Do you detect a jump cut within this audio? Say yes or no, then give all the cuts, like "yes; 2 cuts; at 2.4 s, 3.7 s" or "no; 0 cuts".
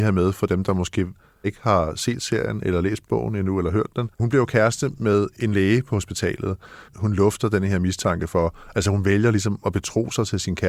yes; 2 cuts; at 4.1 s, 6.9 s